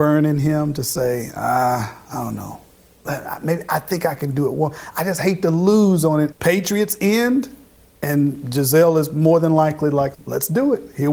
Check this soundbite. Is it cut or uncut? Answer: cut